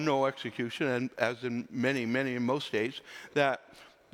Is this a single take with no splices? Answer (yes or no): yes